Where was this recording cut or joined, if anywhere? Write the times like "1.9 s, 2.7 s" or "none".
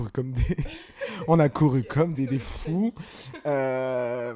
2.2 s

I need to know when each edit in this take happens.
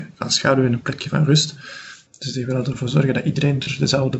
2.1 s

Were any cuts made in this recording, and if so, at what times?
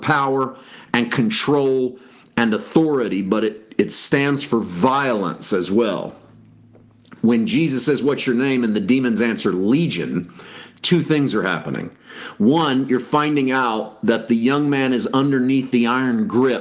none

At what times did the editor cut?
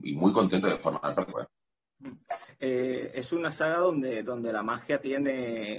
1.3 s

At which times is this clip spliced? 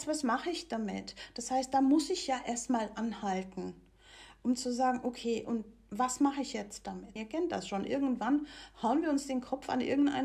7.2 s

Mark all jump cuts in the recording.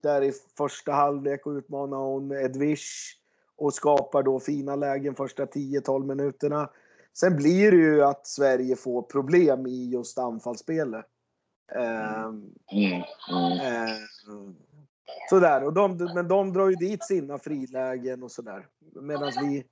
12.6 s

